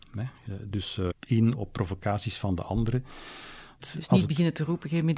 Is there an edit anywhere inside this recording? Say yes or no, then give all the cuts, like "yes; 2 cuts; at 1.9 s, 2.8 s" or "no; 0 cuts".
yes; 2 cuts; at 1.1 s, 3.8 s